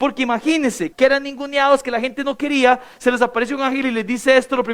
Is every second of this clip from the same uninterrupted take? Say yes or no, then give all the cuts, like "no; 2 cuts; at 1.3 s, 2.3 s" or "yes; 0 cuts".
no; 1 cut; at 0.9 s